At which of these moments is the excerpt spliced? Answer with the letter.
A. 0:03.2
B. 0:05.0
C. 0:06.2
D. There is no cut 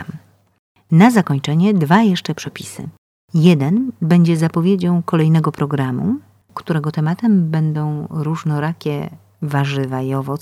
D